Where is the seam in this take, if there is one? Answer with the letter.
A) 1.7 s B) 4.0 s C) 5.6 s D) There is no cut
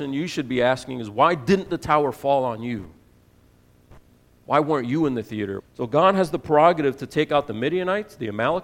C